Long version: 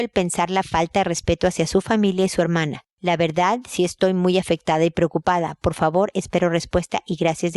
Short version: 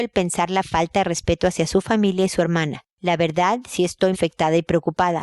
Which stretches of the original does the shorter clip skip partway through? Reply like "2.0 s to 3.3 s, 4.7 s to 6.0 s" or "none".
4.1 s to 4.4 s